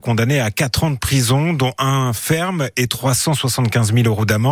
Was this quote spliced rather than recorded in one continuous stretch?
no; 0 cuts

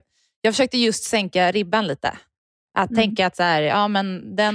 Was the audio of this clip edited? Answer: no; 0 cuts

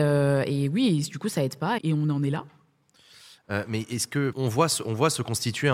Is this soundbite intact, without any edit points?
no; 2 cuts; at 1.8 s, 4.3 s

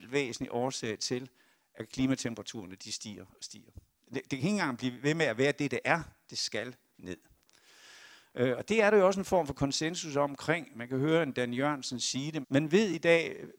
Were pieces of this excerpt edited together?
yes; 2 cuts; at 4.0 s, 12.4 s

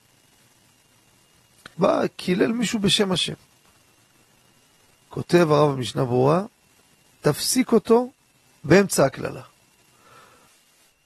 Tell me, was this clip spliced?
yes; 1 cut; at 1.7 s

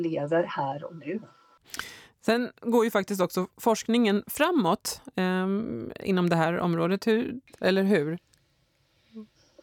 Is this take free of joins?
yes; 0 cuts

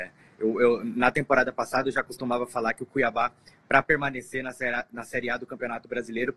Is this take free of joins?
yes; 0 cuts

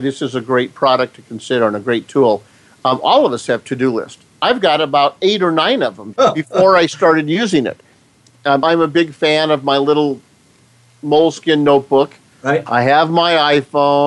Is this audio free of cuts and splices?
no; 2 cuts; at 6.1 s, 8.6 s

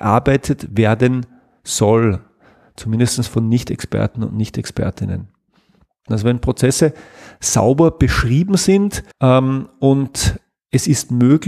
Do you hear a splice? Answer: yes; 2 cuts; at 6.1 s, 9.1 s

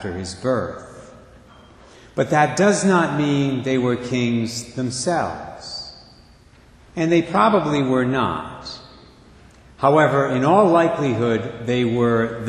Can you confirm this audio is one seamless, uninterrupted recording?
yes; 0 cuts

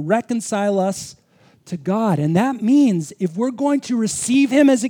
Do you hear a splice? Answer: no; 0 cuts

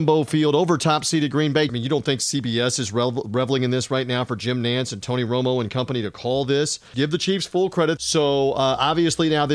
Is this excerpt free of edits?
no; 3 cuts; at 1.7 s, 6.9 s, 8.0 s

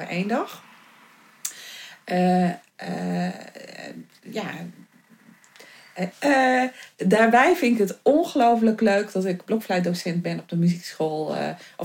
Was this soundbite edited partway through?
yes; 2 cuts; at 2.6 s, 6.1 s

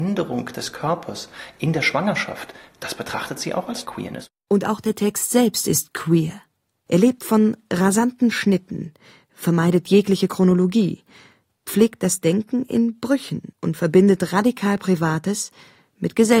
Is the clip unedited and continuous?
no; 2 cuts; at 6.9 s, 13.5 s

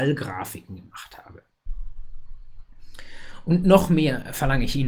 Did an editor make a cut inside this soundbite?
no; 0 cuts

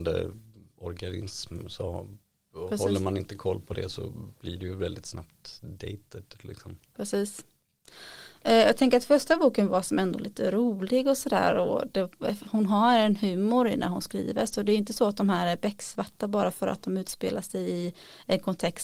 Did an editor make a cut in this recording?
no; 0 cuts

